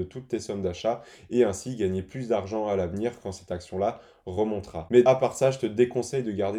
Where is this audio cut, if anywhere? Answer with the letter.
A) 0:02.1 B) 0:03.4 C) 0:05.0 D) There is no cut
C